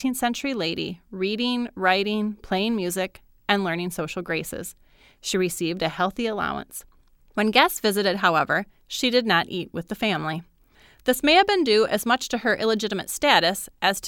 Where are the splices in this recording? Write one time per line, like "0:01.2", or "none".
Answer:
none